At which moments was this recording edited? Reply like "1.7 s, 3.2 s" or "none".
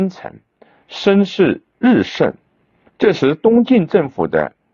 2.9 s

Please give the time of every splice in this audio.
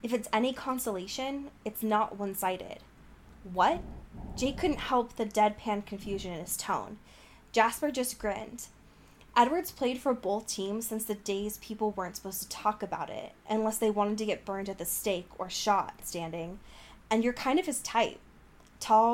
16.0 s

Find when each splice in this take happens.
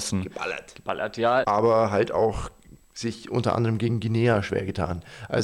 1.4 s

